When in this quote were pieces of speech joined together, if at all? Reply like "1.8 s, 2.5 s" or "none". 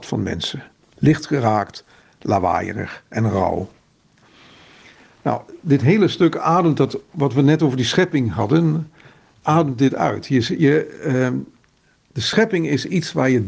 none